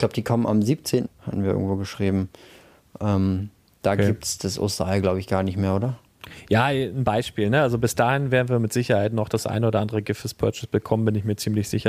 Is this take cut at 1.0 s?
yes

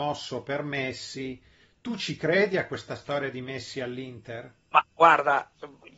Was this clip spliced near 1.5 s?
no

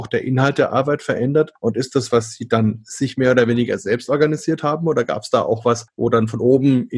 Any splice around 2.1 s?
yes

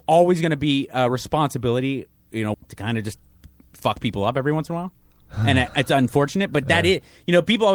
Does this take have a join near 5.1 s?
no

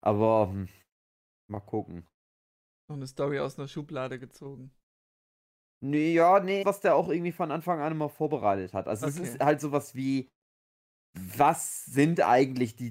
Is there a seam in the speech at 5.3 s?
no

